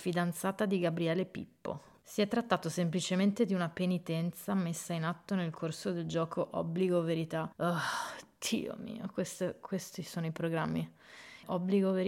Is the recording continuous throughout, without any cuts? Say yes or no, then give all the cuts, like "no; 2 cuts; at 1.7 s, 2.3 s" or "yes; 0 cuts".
no; 1 cut; at 7.5 s